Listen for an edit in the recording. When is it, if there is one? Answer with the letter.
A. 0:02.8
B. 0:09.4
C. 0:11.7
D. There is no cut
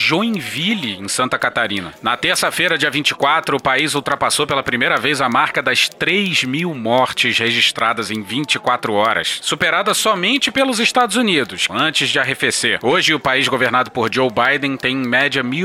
C